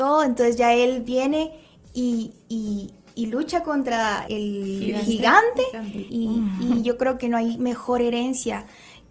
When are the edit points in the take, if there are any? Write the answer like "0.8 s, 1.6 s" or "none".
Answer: 4.3 s, 6.1 s